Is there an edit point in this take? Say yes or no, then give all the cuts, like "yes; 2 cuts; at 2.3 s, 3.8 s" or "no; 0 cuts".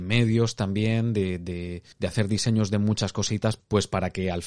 yes; 1 cut; at 1.9 s